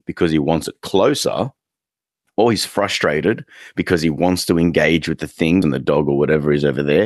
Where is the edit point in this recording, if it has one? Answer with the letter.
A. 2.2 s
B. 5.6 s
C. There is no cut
B